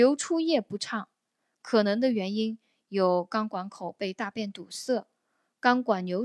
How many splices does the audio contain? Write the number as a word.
zero